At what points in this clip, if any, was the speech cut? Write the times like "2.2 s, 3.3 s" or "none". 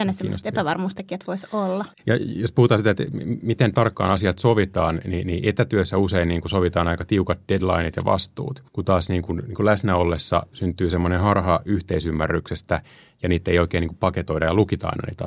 2.0 s